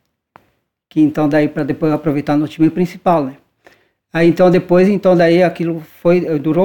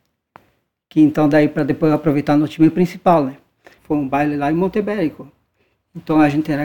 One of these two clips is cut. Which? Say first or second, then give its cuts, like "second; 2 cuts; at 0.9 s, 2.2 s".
second; 1 cut; at 3.8 s